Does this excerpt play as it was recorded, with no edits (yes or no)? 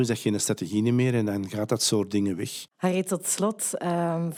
no